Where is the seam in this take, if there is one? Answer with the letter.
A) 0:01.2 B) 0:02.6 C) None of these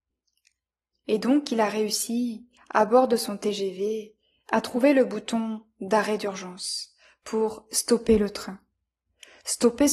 C